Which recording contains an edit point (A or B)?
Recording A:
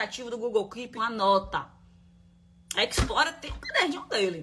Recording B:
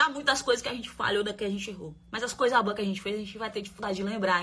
A